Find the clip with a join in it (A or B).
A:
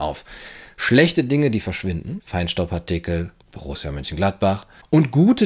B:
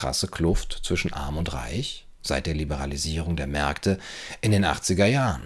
A